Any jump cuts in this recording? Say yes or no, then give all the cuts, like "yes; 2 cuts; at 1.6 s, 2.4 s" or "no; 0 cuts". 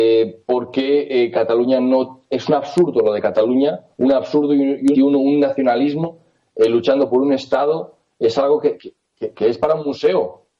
yes; 2 cuts; at 4.9 s, 9.0 s